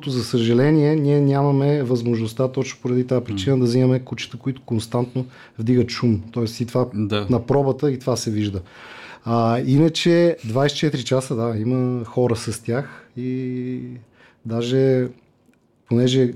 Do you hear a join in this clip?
no; 0 cuts

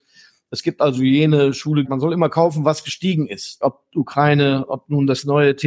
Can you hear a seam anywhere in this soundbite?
yes; 2 cuts; at 1.8 s, 3.6 s

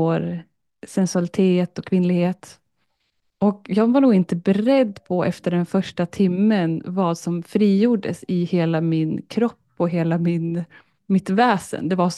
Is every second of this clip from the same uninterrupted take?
yes; 0 cuts

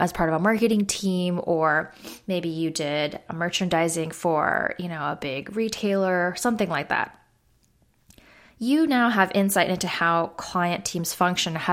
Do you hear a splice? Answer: no; 0 cuts

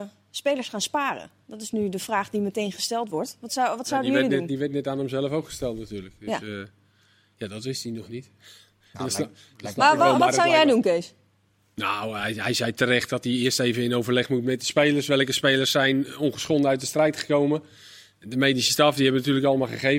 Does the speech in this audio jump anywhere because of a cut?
no; 0 cuts

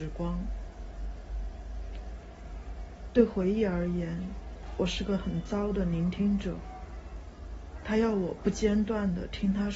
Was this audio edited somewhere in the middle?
no; 0 cuts

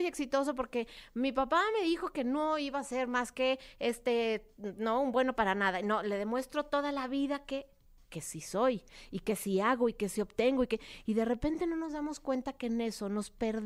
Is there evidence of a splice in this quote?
no; 0 cuts

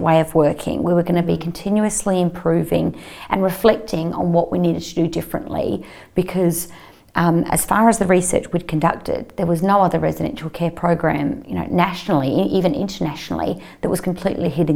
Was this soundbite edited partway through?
no; 0 cuts

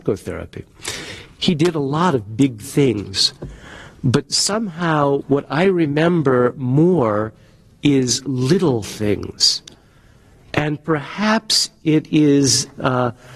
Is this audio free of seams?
no; 1 cut; at 5.2 s

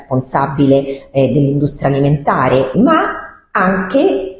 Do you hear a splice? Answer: yes; 1 cut; at 2.7 s

